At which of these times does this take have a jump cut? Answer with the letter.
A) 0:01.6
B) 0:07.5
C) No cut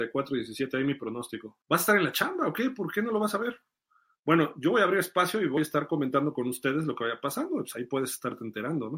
A